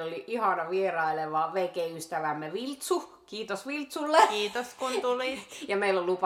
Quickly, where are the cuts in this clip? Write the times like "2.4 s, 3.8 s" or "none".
none